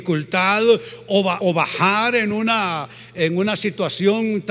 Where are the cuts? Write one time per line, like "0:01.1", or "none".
0:01.4